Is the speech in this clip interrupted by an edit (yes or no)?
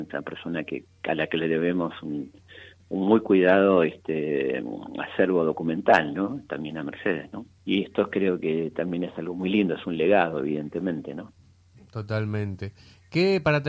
yes